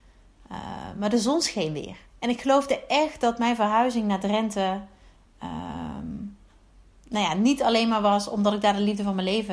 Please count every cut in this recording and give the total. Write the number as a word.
one